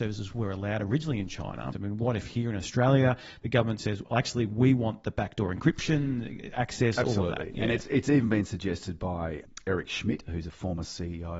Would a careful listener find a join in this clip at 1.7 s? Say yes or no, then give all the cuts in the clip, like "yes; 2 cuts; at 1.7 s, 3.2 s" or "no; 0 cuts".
yes; 1 cut; at 1.7 s